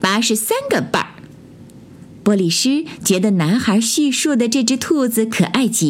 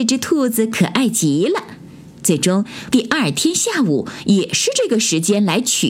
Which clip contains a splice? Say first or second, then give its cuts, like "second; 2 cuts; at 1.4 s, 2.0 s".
second; 1 cut; at 2.9 s